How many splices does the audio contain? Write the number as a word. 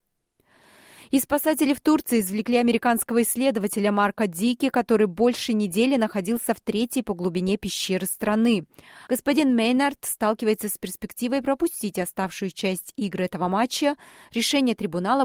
one